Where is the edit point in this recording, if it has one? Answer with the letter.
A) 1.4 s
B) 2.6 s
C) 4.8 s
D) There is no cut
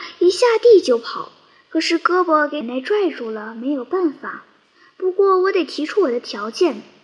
B